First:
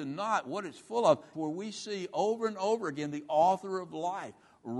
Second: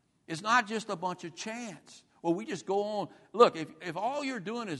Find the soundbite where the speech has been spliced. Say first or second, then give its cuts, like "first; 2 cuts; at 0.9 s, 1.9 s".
first; 1 cut; at 1.3 s